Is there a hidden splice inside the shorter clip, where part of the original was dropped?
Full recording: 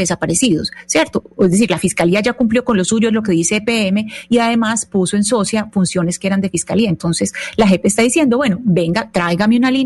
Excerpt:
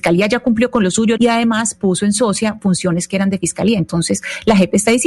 yes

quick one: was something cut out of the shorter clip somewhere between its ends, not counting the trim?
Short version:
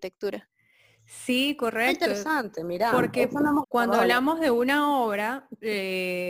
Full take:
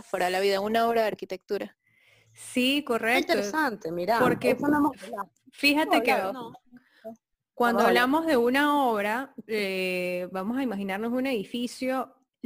yes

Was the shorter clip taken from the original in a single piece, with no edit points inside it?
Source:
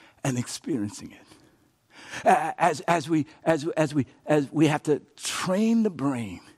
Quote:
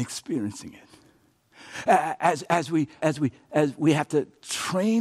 no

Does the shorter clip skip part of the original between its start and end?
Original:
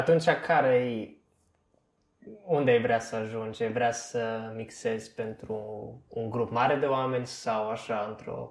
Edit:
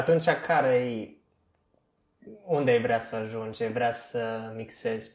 no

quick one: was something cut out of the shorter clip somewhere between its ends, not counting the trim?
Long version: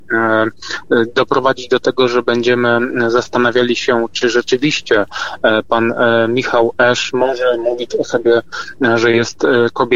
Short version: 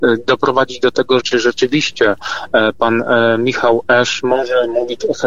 yes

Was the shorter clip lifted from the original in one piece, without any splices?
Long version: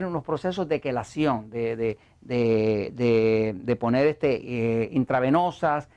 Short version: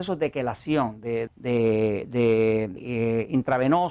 no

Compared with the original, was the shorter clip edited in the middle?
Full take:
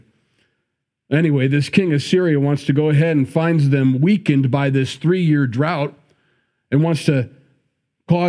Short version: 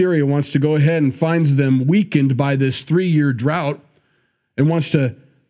no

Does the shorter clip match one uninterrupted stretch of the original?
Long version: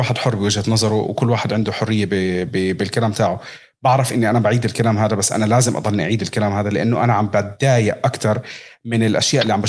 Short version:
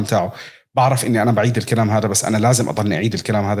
yes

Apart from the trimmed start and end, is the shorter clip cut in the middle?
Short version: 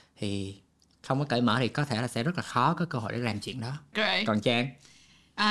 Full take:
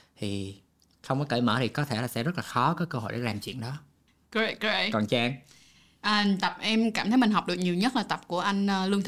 yes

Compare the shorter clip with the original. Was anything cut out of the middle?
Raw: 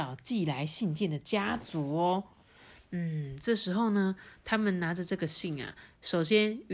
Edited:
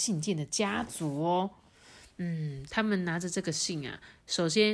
yes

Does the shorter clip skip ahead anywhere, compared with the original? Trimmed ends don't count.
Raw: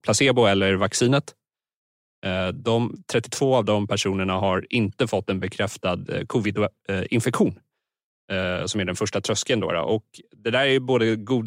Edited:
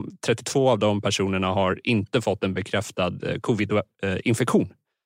no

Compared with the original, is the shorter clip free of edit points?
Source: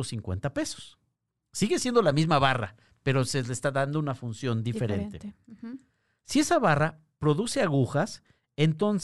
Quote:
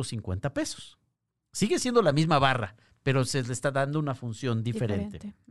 yes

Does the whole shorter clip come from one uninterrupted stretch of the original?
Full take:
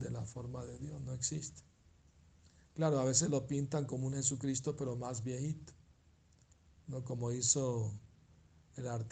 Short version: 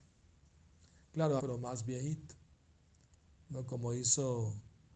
no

